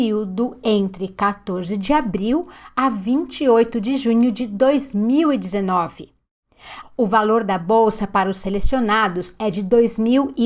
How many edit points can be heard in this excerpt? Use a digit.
1